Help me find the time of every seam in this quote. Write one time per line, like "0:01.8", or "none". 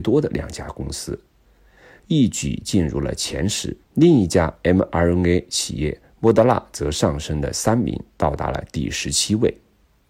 0:02.0
0:03.8